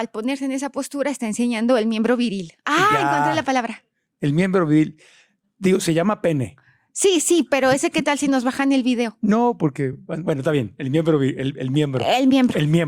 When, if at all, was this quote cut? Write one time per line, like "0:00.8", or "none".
none